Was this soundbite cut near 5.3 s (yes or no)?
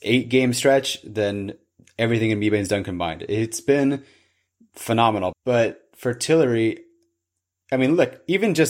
yes